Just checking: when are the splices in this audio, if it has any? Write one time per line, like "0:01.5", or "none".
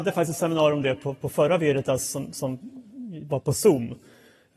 none